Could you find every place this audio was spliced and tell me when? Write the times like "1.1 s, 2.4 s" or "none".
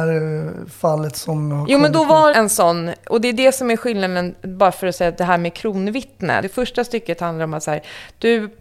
2.3 s, 6.4 s